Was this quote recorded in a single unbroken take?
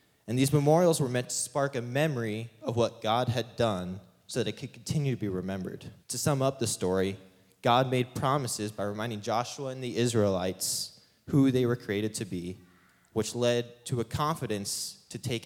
no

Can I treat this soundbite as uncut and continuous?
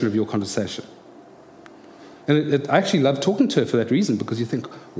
yes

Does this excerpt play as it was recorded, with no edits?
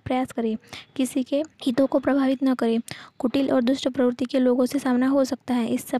no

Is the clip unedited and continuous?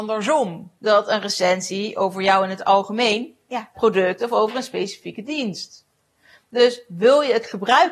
no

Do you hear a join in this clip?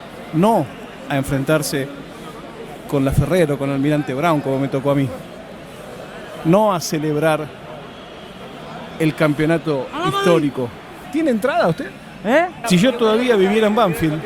yes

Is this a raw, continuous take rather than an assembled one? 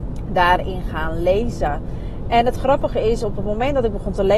yes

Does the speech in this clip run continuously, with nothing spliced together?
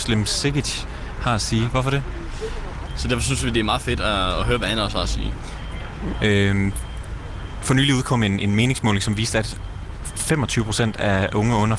no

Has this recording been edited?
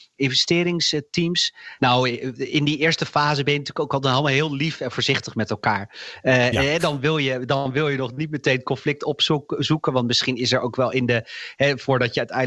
yes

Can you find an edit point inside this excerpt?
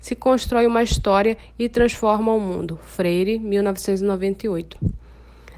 no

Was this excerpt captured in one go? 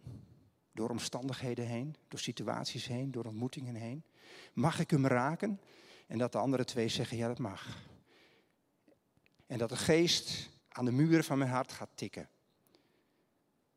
no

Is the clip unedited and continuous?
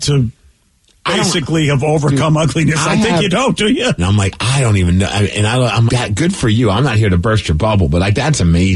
no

